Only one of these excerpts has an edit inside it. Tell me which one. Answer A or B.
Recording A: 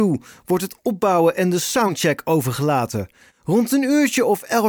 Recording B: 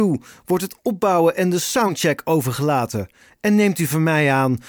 A